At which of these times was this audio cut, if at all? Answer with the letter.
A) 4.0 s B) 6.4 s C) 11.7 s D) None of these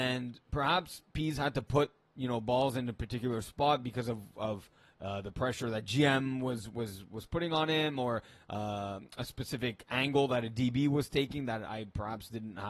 C